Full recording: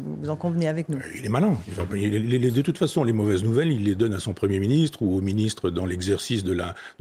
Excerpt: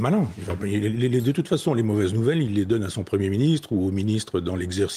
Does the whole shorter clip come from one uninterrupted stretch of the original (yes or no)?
yes